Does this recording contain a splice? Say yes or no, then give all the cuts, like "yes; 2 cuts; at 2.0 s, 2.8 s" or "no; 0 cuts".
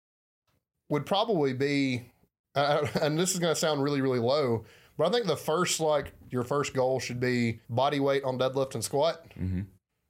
yes; 2 cuts; at 6.3 s, 7.6 s